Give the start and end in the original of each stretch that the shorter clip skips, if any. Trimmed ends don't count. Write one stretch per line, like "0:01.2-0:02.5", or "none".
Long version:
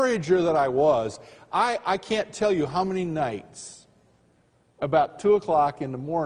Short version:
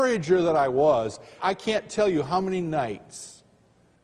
0:01.4-0:01.8